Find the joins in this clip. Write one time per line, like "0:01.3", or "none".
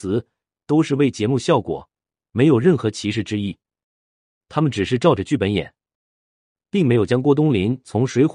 0:04.4
0:06.6

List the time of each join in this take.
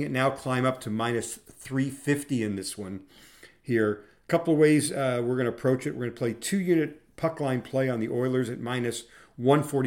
none

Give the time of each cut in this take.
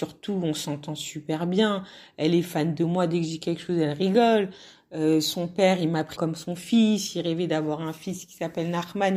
0:06.2

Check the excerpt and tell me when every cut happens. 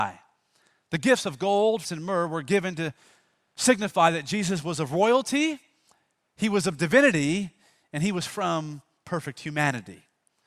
0:01.8

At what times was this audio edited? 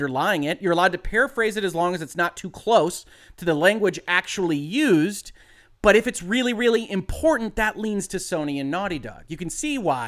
none

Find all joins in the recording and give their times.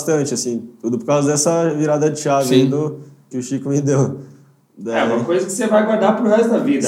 0:03.3

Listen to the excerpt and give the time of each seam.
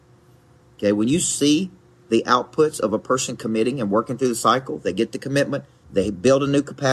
0:05.8

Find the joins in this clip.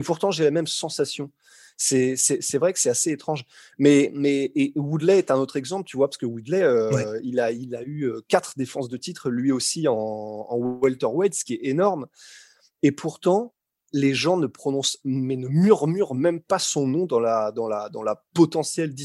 none

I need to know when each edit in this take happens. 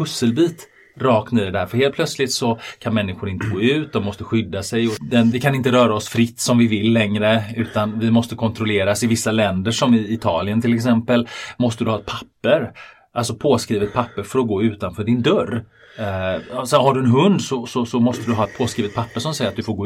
0:05.3

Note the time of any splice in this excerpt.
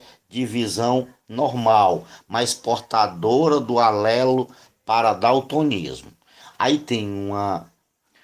none

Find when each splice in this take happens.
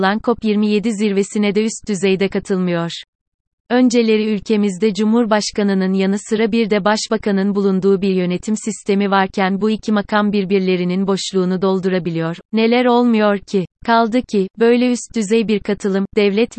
0:12.4
0:13.7

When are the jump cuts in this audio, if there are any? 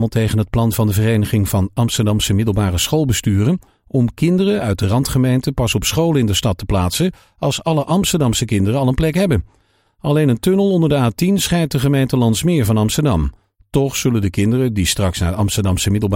none

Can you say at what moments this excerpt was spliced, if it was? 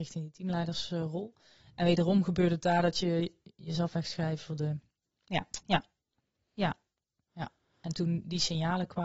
0:05.6

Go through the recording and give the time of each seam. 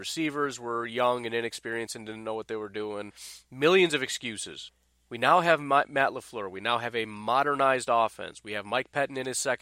none

